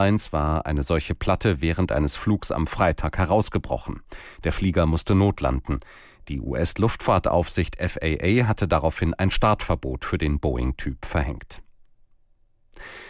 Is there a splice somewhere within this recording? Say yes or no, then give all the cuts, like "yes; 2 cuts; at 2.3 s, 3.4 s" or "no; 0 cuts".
no; 0 cuts